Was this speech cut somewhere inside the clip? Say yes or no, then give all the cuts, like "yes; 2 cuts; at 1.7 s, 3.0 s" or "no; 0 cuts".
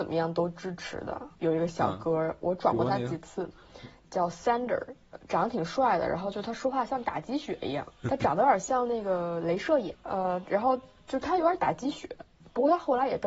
yes; 2 cuts; at 1.3 s, 9.9 s